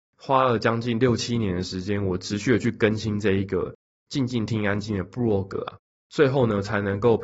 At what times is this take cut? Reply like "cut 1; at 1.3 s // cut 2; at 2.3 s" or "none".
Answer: cut 1; at 4.5 s